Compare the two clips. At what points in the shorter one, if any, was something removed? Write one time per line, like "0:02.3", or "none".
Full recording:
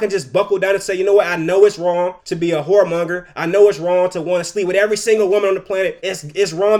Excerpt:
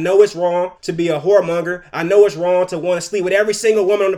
none